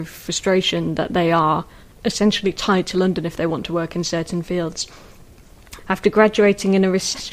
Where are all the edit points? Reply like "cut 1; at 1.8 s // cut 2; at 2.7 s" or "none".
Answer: cut 1; at 5.8 s